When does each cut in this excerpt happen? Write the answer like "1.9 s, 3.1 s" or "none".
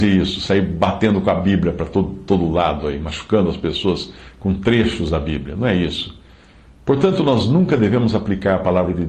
none